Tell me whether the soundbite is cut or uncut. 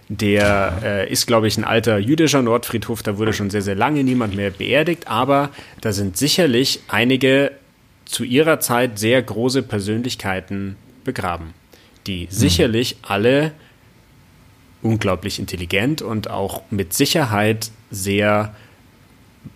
uncut